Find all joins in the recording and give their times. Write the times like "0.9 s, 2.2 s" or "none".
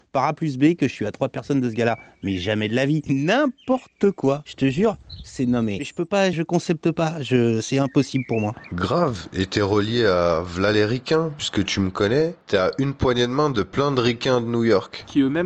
3.1 s, 6.3 s

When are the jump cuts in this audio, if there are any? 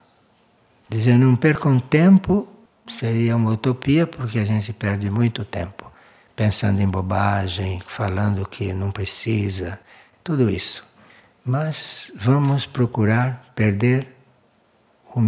none

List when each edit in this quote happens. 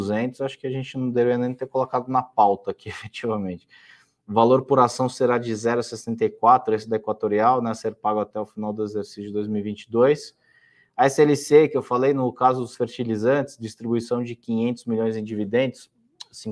none

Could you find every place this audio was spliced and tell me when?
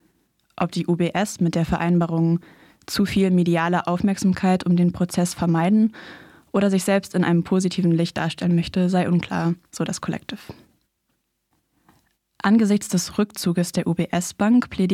9.6 s

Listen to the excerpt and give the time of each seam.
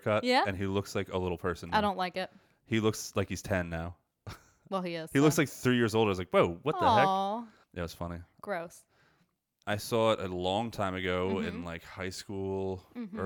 7.6 s, 9.6 s

